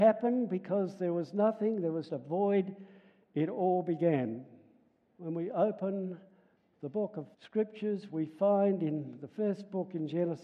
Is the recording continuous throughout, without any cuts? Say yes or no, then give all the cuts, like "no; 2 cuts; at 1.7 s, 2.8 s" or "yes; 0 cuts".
no; 3 cuts; at 2.1 s, 5.1 s, 7.3 s